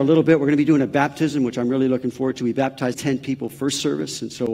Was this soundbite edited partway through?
yes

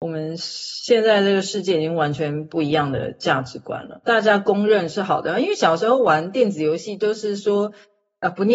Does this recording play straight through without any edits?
no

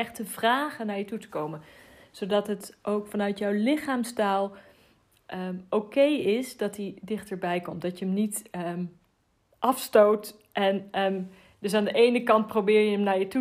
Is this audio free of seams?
yes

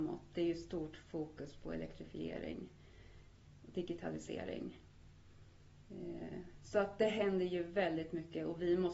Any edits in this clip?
no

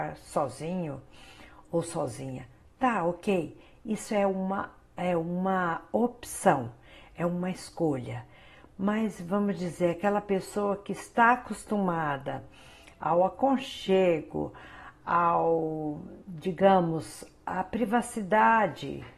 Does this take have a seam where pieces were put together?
no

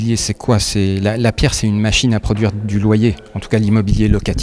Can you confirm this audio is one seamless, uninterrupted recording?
yes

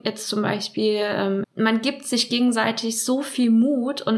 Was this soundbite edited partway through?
yes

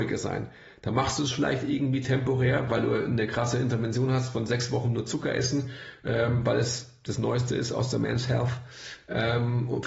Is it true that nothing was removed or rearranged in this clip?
yes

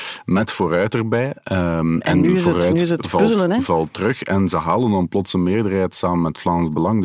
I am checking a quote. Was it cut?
no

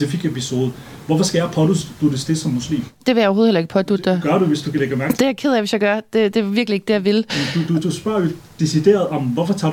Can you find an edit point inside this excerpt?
no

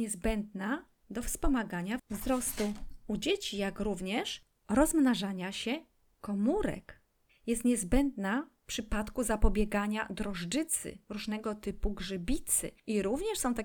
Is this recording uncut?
no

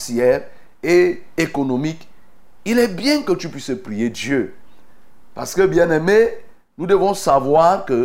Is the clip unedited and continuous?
yes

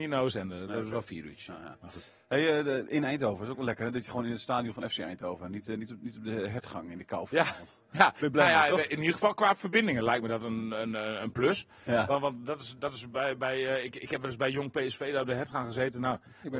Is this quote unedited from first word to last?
yes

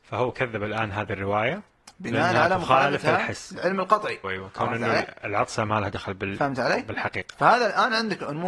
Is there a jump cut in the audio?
yes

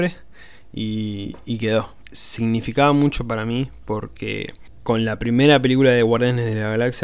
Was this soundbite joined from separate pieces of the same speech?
yes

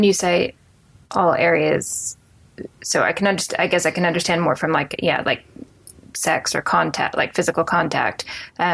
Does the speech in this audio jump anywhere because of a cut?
no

